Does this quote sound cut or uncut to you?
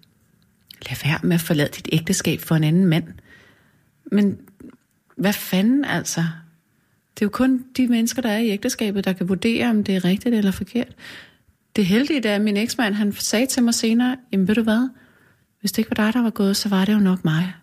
uncut